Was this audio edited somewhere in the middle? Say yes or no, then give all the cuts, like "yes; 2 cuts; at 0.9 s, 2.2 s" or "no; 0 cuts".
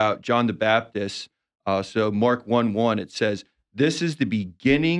no; 0 cuts